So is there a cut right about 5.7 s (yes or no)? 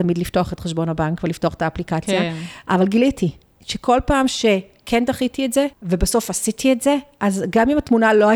yes